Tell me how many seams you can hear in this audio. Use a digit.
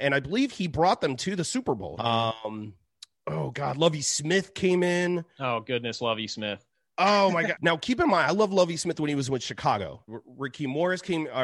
3